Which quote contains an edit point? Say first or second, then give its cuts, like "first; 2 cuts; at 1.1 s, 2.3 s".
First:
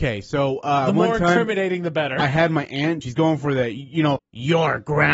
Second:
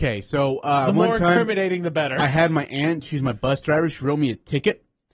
first; 2 cuts; at 3.0 s, 4.2 s